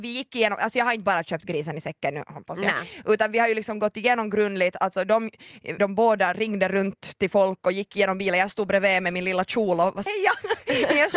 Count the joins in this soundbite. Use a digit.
2